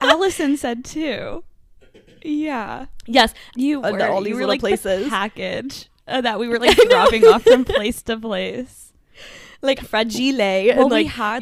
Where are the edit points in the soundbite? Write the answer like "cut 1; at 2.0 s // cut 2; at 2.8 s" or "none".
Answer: cut 1; at 3.5 s // cut 2; at 9.8 s